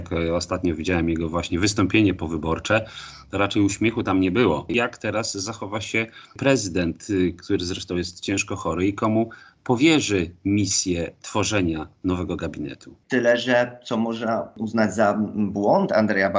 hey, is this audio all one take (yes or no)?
no